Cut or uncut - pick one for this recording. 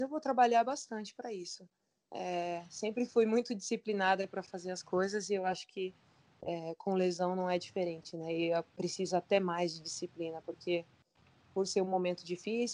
uncut